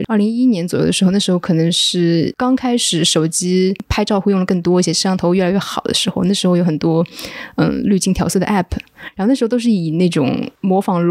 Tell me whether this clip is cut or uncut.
uncut